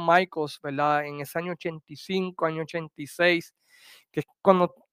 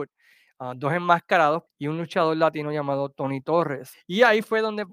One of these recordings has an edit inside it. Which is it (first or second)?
second